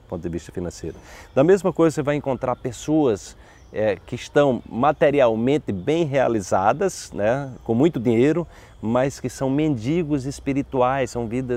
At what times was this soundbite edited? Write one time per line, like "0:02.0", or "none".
none